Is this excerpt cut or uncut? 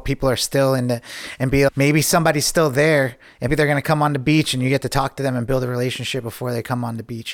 cut